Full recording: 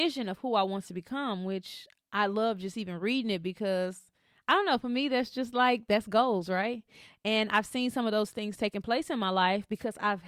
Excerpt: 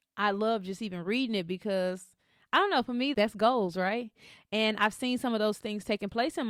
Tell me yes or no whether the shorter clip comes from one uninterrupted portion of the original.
no